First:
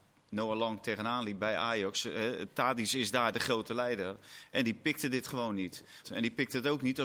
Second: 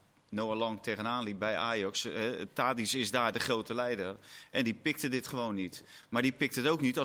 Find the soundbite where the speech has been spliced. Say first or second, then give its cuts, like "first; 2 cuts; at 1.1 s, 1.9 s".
first; 1 cut; at 6.0 s